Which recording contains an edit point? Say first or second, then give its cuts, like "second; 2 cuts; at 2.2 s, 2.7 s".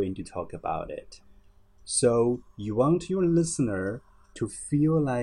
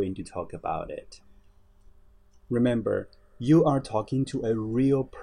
first; 1 cut; at 1.6 s